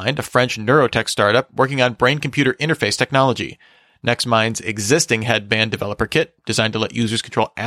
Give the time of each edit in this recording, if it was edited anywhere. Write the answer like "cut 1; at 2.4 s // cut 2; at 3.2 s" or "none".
none